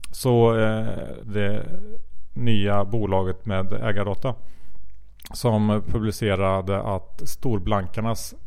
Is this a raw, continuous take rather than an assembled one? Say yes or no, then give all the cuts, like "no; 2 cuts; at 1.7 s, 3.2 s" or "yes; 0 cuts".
no; 2 cuts; at 1.2 s, 7.2 s